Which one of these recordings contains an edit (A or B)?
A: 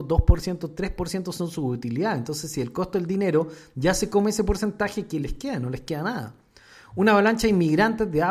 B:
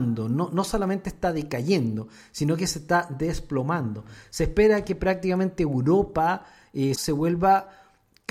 B